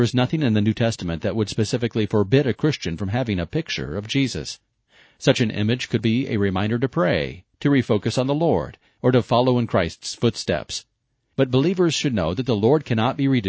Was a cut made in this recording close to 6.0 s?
yes; 1 cut; at 6.0 s

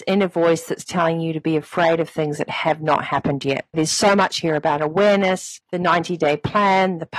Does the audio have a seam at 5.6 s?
yes; 2 cuts; at 3.7 s, 5.6 s

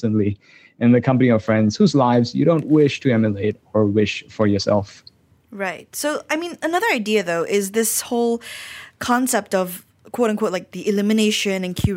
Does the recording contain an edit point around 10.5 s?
no; 0 cuts

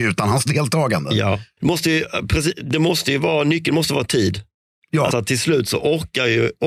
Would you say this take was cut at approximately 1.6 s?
yes; 2 cuts; at 1.6 s, 5.1 s

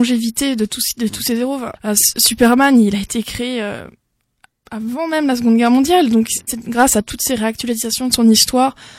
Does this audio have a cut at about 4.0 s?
no; 2 cuts; at 1.7 s, 6.5 s

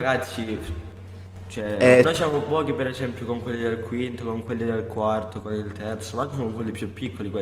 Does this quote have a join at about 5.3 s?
no; 1 cut; at 2.0 s

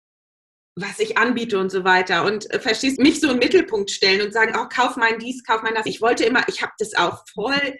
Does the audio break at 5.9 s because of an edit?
yes; 2 cuts; at 3.0 s, 5.9 s

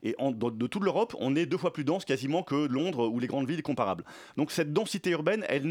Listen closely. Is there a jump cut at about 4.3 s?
no; 0 cuts

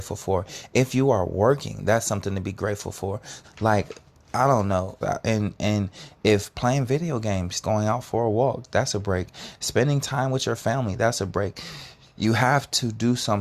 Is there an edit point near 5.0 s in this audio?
yes; 3 cuts; at 3.4 s, 5.0 s, 7.6 s

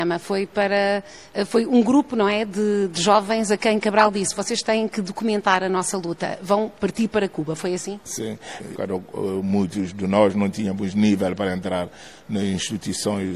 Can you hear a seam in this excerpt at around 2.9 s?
no; 1 cut; at 8.7 s

